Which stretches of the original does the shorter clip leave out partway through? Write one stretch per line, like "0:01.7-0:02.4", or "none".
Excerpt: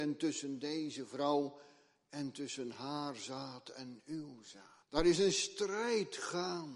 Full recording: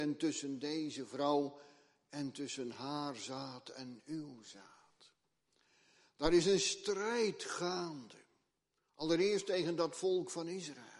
0:04.8-0:06.1